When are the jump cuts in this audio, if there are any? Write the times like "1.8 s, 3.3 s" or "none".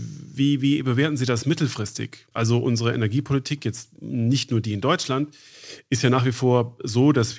2.3 s